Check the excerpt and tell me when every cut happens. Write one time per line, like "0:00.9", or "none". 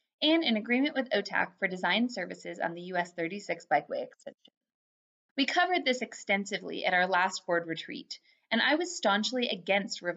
0:05.3